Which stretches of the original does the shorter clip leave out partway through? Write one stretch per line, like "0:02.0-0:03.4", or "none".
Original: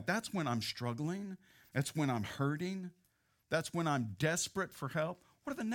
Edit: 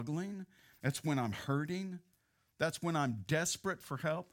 none